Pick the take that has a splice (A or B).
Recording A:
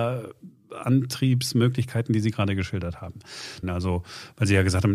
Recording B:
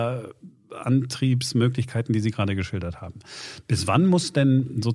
A